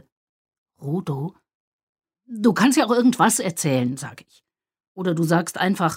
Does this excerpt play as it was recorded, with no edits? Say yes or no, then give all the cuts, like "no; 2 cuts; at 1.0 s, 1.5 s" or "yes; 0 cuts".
no; 1 cut; at 2.2 s